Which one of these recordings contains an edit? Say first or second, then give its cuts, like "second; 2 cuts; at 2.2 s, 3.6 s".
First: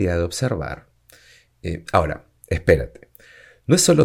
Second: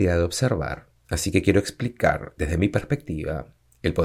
second; 2 cuts; at 1.0 s, 2.4 s